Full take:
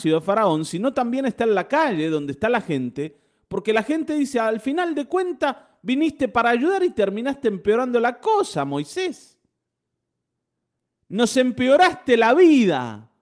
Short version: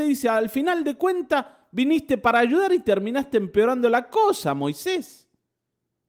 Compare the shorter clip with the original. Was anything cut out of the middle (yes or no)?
no